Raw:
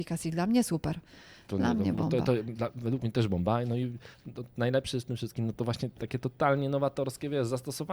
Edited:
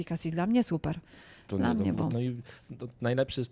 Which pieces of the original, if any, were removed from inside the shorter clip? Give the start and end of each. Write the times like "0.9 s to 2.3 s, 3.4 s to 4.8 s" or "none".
2.1 s to 3.7 s